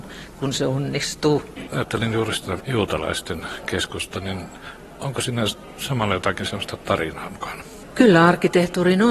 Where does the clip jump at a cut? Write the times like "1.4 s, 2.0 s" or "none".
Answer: 1.7 s